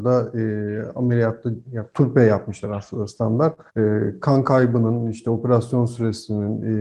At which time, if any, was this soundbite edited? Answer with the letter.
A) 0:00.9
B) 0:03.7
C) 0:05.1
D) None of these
B